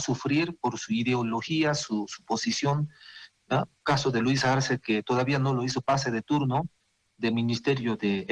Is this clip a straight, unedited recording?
yes; 0 cuts

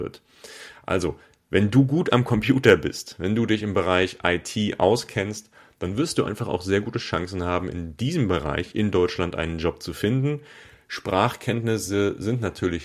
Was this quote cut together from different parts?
no; 0 cuts

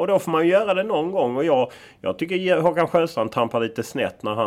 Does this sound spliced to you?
no; 0 cuts

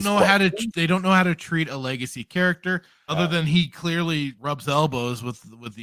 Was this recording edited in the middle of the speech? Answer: yes; 2 cuts; at 3.1 s, 4.3 s

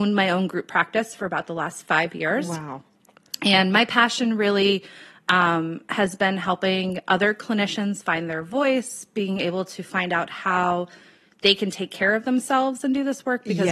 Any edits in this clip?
no; 0 cuts

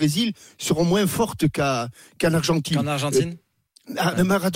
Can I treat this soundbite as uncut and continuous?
yes; 0 cuts

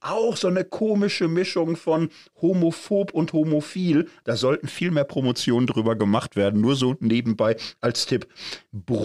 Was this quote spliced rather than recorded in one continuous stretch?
yes; 1 cut; at 4.2 s

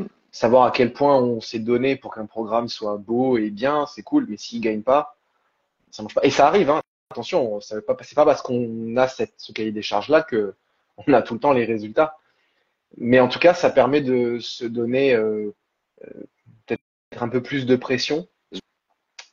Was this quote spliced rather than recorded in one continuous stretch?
no; 0 cuts

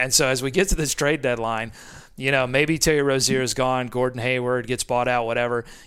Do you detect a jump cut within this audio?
no; 0 cuts

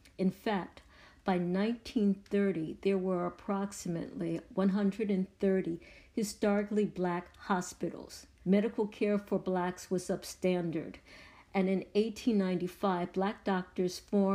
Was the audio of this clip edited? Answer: yes; 1 cut; at 8.4 s

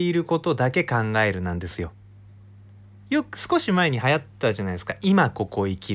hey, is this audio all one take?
yes; 0 cuts

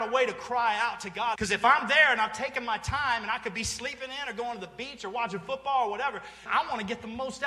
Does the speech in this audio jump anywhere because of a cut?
yes; 2 cuts; at 1.3 s, 6.5 s

